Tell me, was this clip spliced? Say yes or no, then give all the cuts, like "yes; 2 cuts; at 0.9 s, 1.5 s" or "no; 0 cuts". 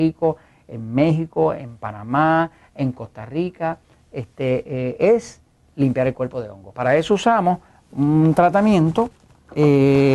no; 0 cuts